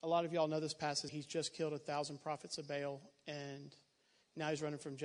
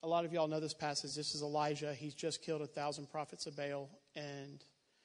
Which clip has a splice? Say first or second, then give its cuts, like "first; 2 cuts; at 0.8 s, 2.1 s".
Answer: first; 1 cut; at 1.1 s